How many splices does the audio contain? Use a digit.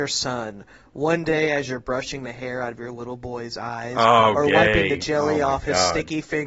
0